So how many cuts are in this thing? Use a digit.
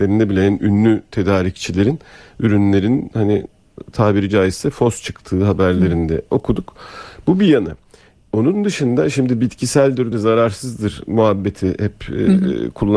1